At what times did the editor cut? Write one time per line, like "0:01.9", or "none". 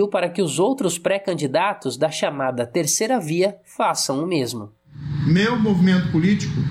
none